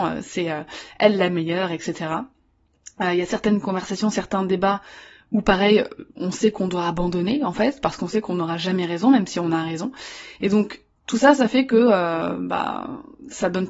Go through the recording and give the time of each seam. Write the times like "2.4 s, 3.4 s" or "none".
none